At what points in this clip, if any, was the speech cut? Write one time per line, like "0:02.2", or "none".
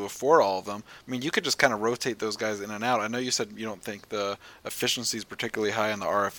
0:01.0